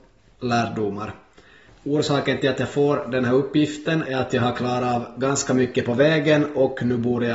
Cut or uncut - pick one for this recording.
cut